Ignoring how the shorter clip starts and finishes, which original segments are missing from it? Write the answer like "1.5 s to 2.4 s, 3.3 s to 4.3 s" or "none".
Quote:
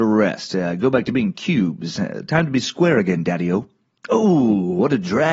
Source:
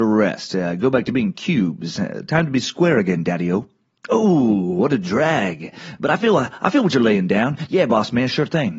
none